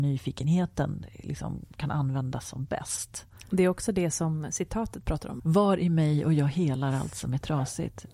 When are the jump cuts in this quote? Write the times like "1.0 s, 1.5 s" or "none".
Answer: 5.4 s